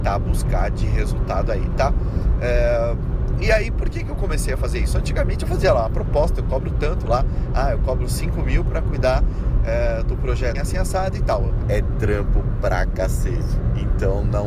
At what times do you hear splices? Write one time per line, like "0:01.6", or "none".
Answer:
0:10.6
0:11.6